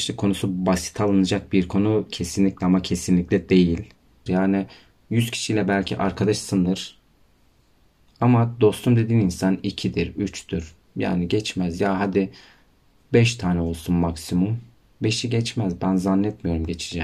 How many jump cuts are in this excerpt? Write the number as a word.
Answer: one